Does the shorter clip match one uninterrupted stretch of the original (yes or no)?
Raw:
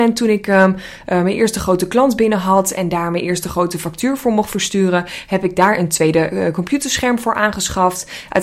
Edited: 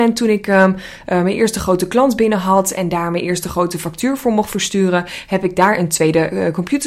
yes